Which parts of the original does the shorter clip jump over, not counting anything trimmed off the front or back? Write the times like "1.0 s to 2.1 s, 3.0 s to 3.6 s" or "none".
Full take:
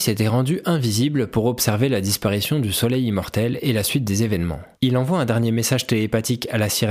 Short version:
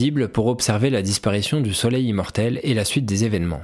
none